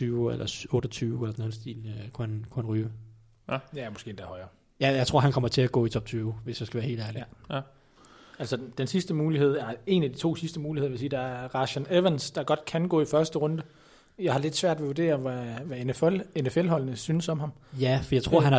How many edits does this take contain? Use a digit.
0